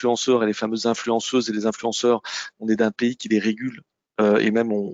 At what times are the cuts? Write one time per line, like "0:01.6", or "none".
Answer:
none